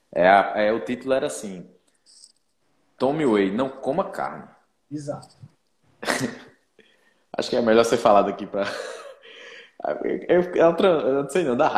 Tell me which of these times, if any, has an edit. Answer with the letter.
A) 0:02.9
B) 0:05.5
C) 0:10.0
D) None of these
B